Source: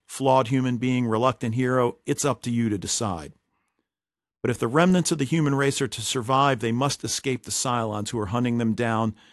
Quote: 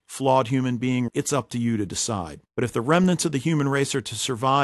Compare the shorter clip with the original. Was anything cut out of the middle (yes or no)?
yes